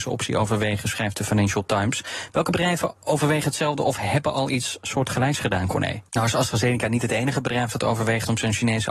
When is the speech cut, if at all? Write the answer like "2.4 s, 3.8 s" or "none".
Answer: 6.1 s